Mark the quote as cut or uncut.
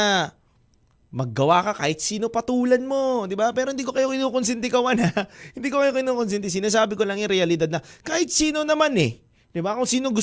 uncut